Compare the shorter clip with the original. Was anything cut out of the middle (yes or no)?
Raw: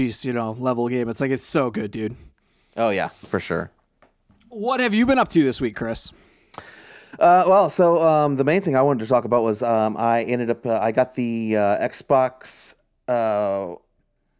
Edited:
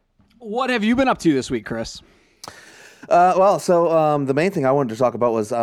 no